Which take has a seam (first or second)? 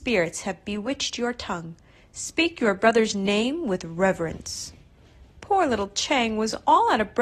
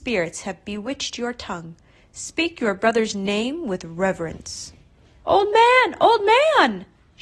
second